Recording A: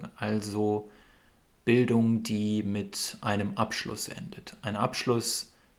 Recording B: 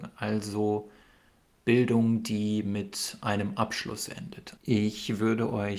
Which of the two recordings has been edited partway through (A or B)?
B